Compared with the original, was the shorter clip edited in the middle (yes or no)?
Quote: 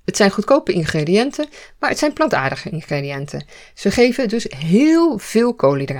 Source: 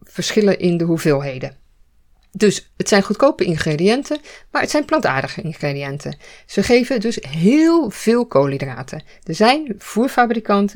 no